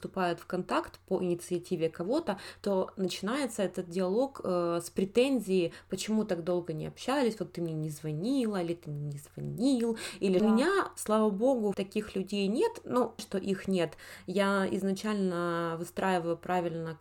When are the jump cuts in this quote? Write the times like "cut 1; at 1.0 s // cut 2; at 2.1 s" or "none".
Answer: cut 1; at 10.4 s // cut 2; at 11.7 s // cut 3; at 13.2 s